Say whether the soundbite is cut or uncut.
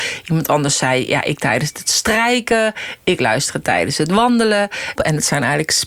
cut